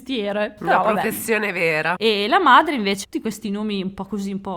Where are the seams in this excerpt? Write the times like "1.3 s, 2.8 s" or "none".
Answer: 1.9 s, 3.0 s